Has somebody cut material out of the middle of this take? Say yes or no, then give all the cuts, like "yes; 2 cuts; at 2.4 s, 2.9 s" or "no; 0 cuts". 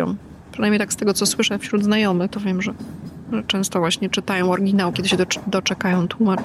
yes; 2 cuts; at 2.3 s, 4.9 s